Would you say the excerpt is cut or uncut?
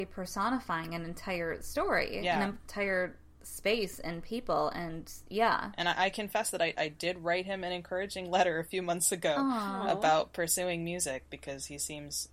uncut